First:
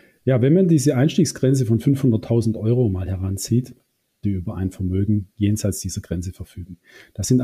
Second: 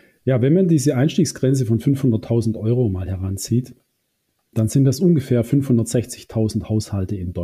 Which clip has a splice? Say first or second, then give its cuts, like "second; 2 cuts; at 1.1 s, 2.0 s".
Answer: first; 1 cut; at 4.2 s